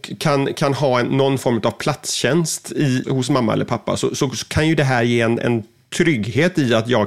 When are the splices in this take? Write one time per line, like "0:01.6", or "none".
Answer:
0:03.0